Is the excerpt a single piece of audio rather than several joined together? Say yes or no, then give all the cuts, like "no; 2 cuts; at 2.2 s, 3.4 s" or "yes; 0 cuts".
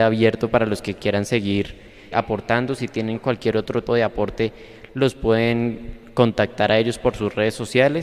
no; 2 cuts; at 2.1 s, 3.9 s